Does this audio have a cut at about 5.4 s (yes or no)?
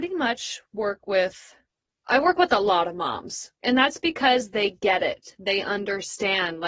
no